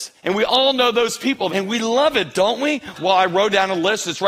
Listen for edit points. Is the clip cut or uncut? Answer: cut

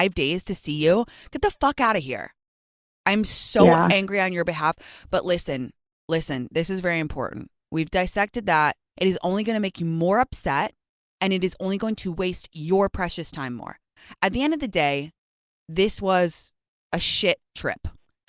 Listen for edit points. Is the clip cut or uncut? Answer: cut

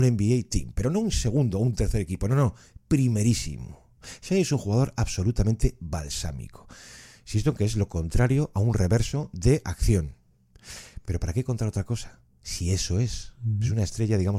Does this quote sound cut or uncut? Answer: uncut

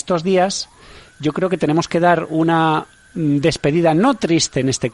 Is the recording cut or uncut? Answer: uncut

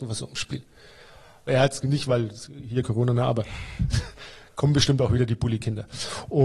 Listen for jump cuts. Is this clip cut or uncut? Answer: cut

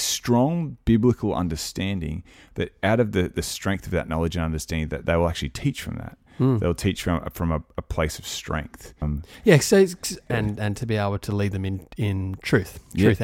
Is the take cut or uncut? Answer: cut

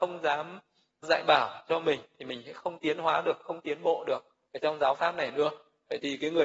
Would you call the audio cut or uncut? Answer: cut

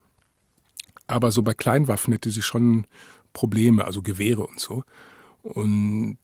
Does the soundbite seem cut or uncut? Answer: uncut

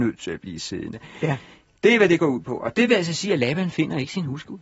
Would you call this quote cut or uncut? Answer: uncut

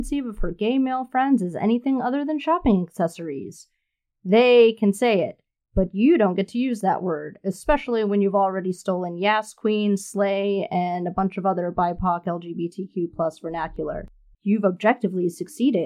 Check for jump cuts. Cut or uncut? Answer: cut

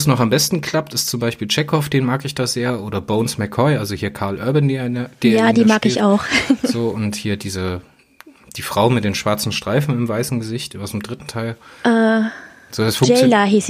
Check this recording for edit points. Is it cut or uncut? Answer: uncut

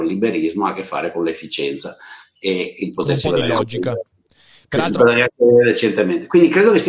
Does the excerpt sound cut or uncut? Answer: uncut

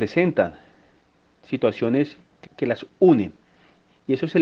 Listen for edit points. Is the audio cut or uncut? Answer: cut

